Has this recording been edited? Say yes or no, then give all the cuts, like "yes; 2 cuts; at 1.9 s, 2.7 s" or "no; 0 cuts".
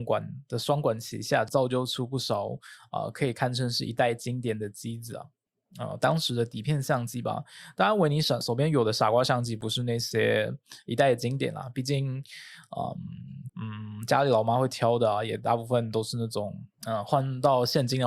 yes; 1 cut; at 16.7 s